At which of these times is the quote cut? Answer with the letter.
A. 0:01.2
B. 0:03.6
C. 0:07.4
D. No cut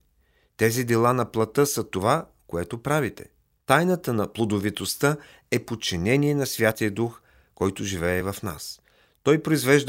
B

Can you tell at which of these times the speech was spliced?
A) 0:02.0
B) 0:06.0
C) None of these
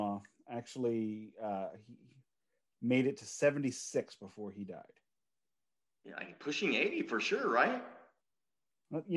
B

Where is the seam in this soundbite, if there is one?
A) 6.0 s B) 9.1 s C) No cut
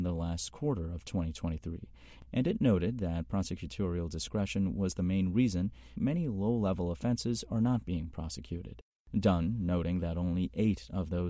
A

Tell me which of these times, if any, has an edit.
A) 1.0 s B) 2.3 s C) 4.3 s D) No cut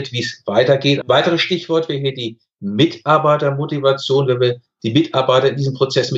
A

